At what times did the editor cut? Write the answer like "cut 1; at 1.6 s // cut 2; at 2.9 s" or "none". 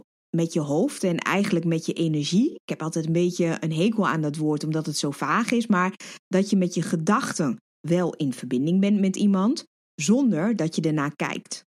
none